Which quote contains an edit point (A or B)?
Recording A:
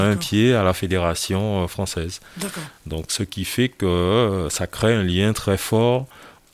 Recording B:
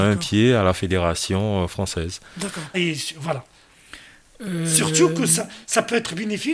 B